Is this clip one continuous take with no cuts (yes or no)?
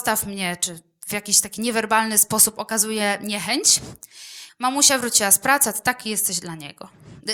no